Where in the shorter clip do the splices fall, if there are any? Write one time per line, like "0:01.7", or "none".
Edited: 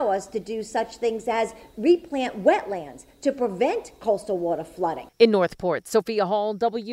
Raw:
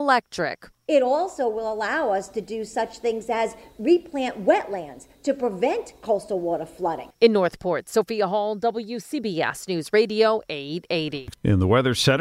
none